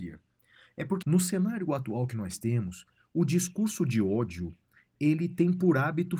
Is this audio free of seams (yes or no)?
no